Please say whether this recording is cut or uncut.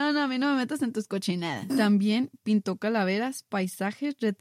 cut